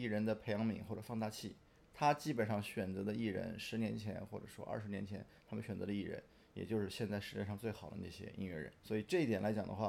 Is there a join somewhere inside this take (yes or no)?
no